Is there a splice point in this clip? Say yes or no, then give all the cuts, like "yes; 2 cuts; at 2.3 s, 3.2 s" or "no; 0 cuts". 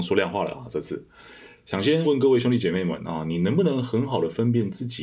yes; 1 cut; at 2.0 s